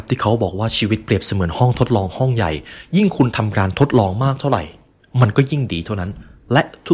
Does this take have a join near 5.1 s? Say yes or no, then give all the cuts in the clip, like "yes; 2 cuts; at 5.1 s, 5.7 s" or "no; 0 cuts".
no; 0 cuts